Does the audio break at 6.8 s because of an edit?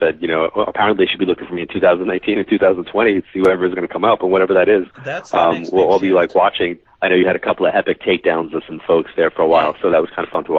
yes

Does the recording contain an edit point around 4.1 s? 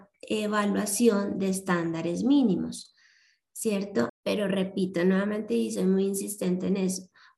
yes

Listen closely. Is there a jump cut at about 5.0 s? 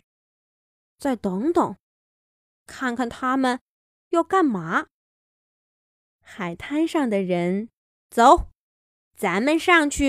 no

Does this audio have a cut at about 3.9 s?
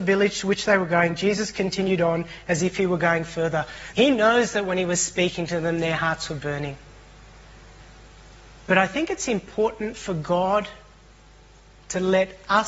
yes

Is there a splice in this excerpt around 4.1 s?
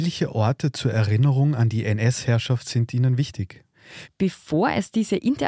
yes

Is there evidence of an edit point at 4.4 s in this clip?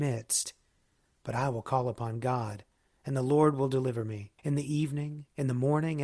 yes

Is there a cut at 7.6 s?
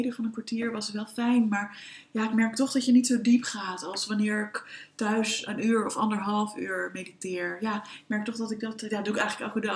no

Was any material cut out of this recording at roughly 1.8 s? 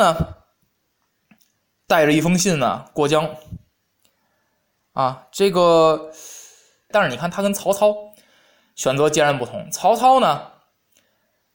no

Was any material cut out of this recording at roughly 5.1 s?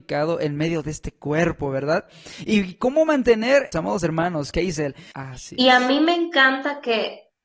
yes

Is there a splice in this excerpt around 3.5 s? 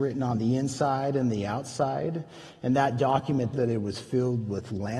yes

